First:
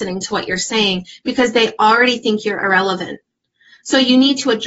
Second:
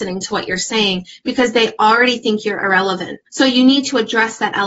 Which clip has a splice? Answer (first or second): second